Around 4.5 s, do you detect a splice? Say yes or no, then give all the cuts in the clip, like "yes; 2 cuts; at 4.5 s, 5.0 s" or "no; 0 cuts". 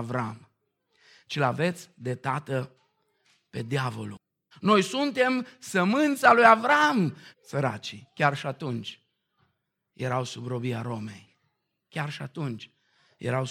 yes; 2 cuts; at 4.5 s, 7.3 s